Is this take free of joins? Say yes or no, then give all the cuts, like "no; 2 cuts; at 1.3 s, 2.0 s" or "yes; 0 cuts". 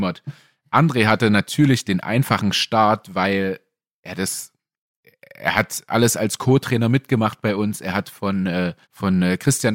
no; 1 cut; at 8.8 s